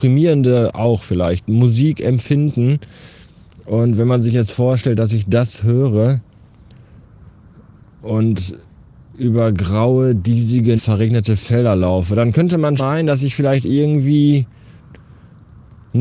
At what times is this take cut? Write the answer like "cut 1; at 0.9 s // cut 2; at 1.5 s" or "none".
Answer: cut 1; at 10.8 s // cut 2; at 12.8 s